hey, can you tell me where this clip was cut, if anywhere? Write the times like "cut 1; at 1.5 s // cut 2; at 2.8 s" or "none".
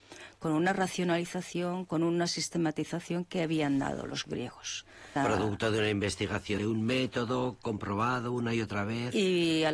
cut 1; at 5.2 s // cut 2; at 6.6 s

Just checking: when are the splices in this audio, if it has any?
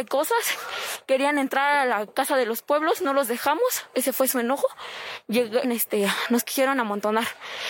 cut 1; at 5.6 s

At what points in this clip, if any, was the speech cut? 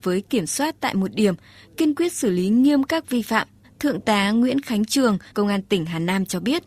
cut 1; at 3.6 s // cut 2; at 5.3 s

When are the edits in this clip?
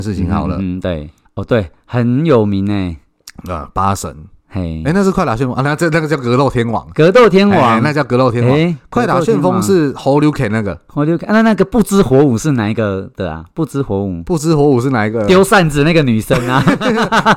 cut 1; at 1.3 s

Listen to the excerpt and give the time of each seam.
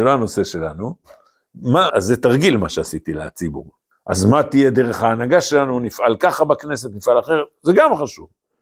cut 1; at 1.9 s // cut 2; at 3.9 s

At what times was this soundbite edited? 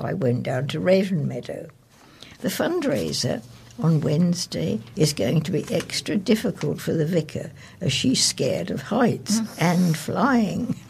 cut 1; at 2.4 s // cut 2; at 4.9 s

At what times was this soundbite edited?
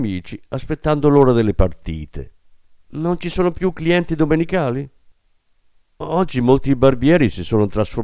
cut 1; at 2.8 s

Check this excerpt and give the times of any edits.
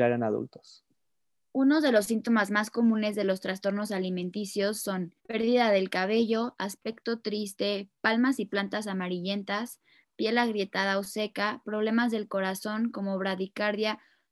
cut 1; at 5.2 s

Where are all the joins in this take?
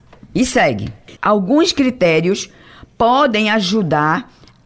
cut 1; at 1.2 s

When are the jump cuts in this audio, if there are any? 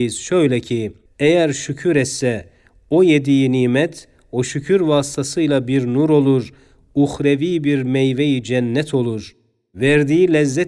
cut 1; at 1.1 s

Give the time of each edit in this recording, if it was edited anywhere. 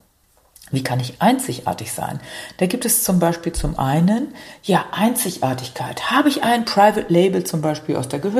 none

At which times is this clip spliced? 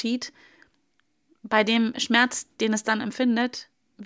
none

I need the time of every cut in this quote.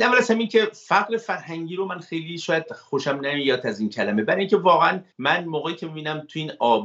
cut 1; at 5.1 s

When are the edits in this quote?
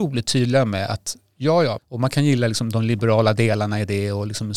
cut 1; at 1.8 s

